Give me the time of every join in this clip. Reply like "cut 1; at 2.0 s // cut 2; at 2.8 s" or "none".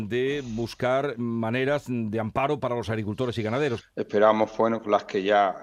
cut 1; at 3.8 s